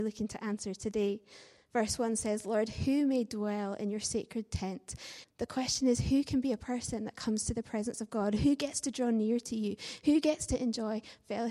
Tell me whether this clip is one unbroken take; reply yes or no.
no